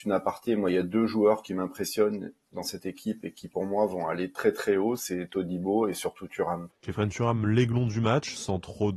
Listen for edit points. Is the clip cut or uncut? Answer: cut